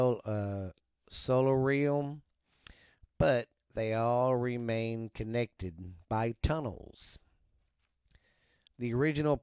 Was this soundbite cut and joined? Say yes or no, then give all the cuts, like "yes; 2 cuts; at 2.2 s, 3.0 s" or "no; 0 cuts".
no; 0 cuts